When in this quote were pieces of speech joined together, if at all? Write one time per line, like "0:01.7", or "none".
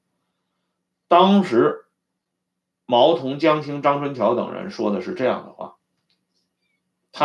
none